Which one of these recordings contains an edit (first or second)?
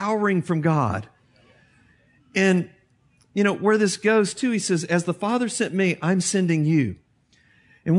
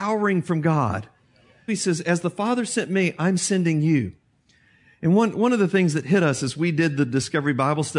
second